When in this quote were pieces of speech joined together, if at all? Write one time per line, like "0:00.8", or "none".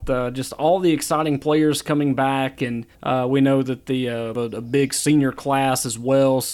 0:02.9
0:04.3